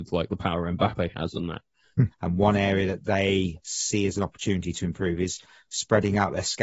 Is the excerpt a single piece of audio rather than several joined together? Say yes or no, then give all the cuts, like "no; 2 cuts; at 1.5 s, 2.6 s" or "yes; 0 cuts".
no; 1 cut; at 2.1 s